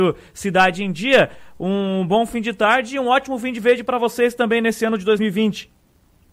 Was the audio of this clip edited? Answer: no; 0 cuts

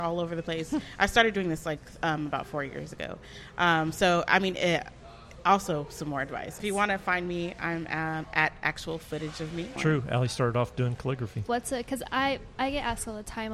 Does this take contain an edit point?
yes; 3 cuts; at 6.6 s, 9.8 s, 11.5 s

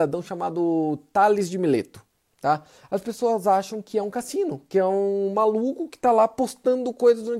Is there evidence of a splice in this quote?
yes; 1 cut; at 2.3 s

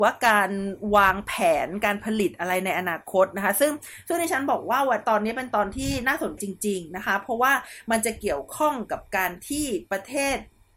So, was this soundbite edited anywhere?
yes; 1 cut; at 6.4 s

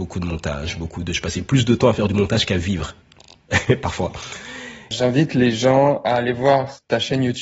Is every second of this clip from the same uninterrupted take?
no; 2 cuts; at 3.0 s, 4.9 s

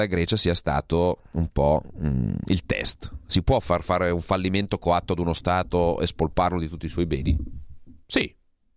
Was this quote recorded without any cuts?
no; 1 cut; at 3.6 s

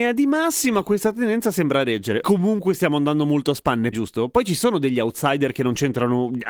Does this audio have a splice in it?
yes; 2 cuts; at 2.2 s, 3.9 s

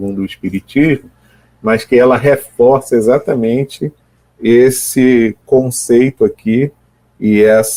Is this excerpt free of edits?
yes; 0 cuts

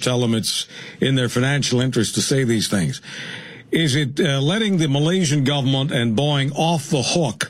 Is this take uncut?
yes; 0 cuts

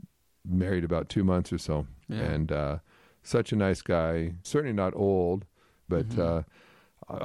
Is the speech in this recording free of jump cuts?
no; 2 cuts; at 4.4 s, 5.9 s

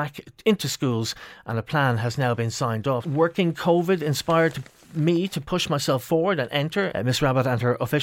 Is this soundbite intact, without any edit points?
no; 2 cuts; at 3.0 s, 6.9 s

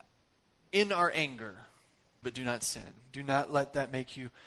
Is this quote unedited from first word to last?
no; 1 cut; at 2.2 s

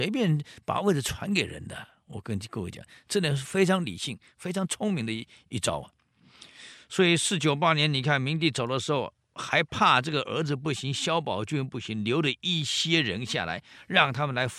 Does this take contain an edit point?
no; 0 cuts

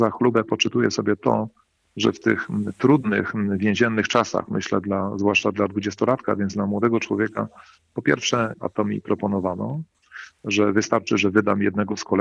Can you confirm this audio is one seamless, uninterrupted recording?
no; 1 cut; at 8.5 s

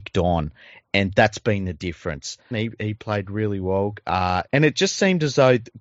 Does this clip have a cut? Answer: yes; 2 cuts; at 2.5 s, 4.5 s

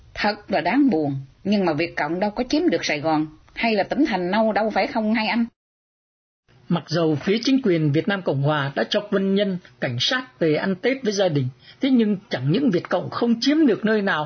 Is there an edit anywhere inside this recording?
yes; 1 cut; at 1.3 s

